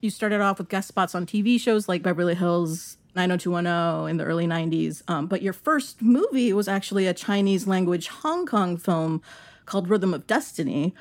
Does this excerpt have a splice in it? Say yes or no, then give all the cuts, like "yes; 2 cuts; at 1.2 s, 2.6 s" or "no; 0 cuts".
no; 0 cuts